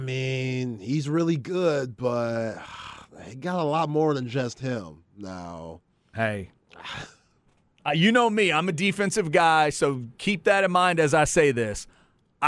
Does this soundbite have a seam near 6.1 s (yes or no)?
no